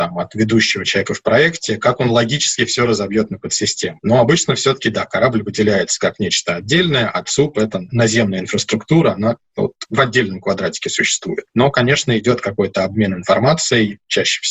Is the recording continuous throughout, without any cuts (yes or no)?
yes